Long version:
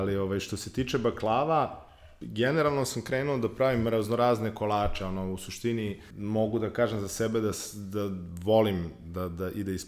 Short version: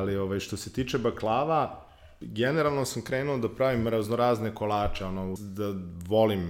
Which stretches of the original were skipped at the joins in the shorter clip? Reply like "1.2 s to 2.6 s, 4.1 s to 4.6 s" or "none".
5.4 s to 7.7 s